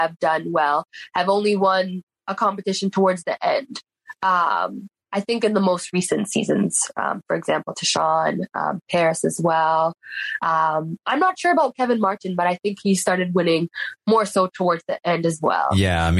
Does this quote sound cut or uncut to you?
uncut